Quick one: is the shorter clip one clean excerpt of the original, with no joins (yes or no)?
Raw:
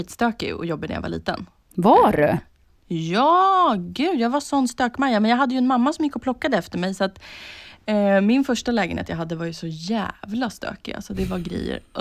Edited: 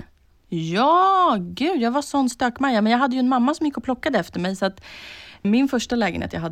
no